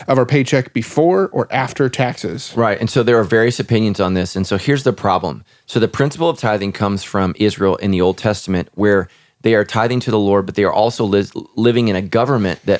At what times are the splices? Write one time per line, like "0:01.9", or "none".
none

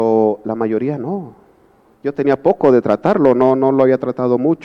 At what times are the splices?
0:01.9

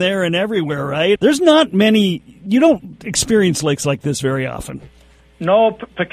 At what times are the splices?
0:01.2

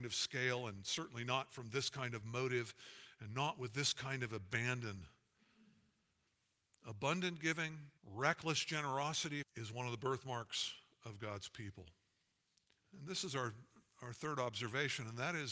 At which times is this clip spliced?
0:08.0
0:09.4
0:12.8

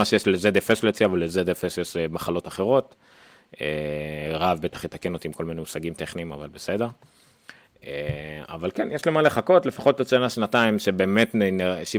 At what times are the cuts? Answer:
none

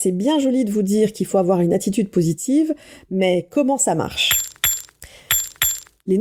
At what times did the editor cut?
none

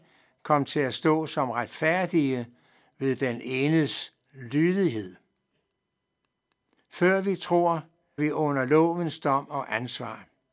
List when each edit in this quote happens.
0:06.8
0:08.2

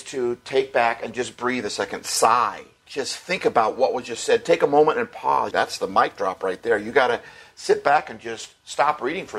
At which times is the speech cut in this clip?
0:05.5

